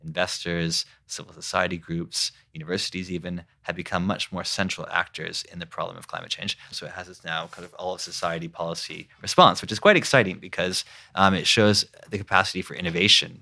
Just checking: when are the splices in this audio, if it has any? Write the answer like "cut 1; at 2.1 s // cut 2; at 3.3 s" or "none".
cut 1; at 6.7 s